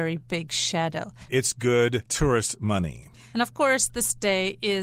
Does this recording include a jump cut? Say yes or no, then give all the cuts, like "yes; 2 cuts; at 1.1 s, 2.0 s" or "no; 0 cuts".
yes; 2 cuts; at 1.3 s, 3.3 s